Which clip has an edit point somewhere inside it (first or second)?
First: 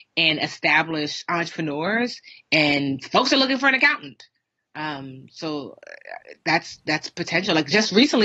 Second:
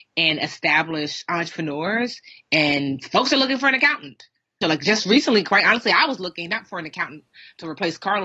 second